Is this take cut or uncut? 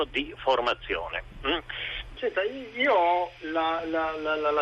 cut